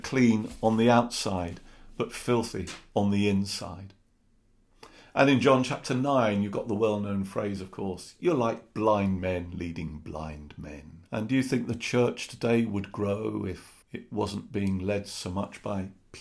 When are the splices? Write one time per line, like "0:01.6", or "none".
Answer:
0:11.1
0:13.8